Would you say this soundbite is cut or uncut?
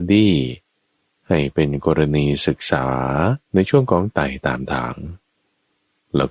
cut